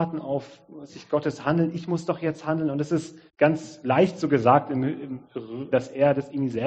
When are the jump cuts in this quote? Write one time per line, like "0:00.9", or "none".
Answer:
0:03.3
0:05.7